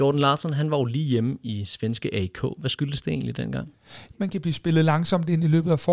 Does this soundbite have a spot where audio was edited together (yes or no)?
yes